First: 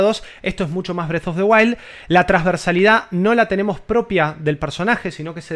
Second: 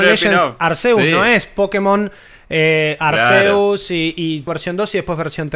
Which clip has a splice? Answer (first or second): second